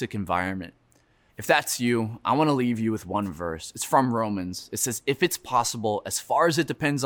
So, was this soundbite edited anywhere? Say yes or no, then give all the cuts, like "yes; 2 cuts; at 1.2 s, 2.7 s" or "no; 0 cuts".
yes; 1 cut; at 1.3 s